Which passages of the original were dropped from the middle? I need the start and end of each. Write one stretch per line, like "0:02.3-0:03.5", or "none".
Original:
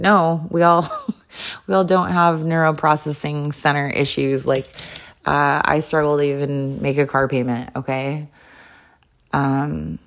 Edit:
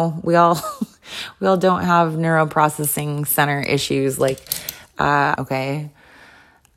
0:05.6-0:07.7